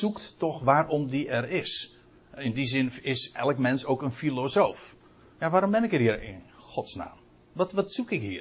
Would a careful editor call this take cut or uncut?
uncut